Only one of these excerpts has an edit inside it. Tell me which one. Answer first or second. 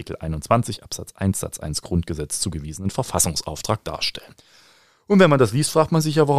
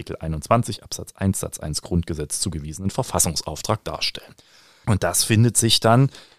second